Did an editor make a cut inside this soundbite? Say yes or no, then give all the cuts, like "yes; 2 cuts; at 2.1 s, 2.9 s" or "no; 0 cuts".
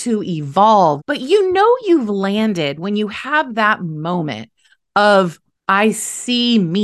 yes; 2 cuts; at 1.0 s, 5.5 s